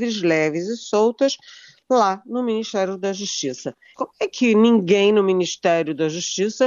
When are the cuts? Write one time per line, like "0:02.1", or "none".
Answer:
0:03.9